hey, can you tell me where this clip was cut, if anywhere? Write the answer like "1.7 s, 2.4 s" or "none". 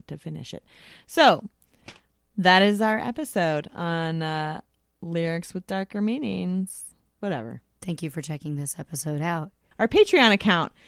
7.2 s, 9.7 s